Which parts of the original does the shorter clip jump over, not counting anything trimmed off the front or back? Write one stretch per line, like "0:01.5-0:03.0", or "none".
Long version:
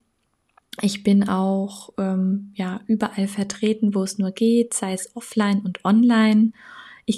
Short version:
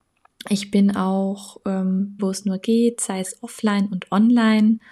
0:02.5-0:03.9